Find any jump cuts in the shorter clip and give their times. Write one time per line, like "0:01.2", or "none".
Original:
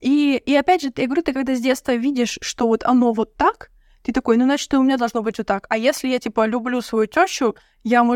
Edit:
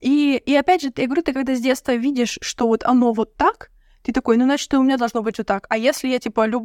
none